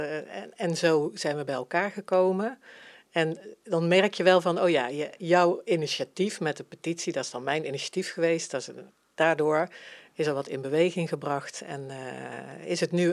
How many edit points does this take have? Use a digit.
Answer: 0